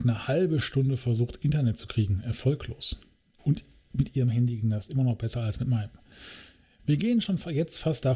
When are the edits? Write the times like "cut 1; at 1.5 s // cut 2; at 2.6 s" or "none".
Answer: none